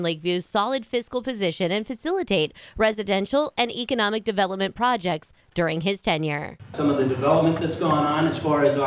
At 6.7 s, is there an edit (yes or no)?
no